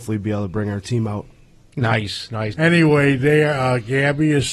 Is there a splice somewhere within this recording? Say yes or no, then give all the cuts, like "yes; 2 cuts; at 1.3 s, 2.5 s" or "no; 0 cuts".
yes; 1 cut; at 2.5 s